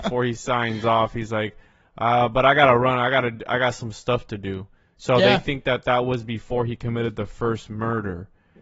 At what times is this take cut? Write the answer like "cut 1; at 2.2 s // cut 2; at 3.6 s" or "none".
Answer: none